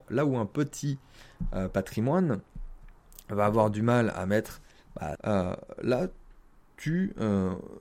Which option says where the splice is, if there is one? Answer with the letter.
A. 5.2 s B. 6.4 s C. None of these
A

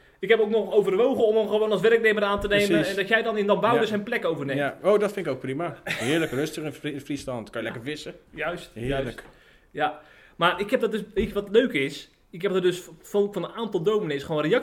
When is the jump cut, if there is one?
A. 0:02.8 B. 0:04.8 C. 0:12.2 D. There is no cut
D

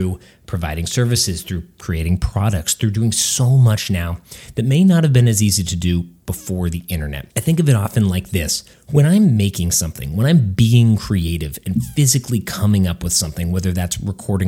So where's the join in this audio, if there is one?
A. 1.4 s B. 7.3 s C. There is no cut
B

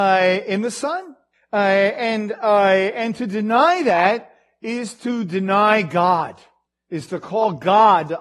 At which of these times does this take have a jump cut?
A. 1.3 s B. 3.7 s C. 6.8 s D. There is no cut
A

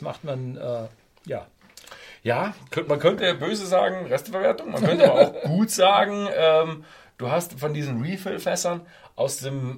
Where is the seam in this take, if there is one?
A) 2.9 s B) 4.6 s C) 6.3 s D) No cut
A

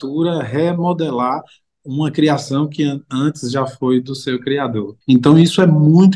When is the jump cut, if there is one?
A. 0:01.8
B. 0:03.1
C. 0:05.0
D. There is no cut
C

